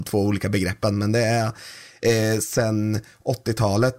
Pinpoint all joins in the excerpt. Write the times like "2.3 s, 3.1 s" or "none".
none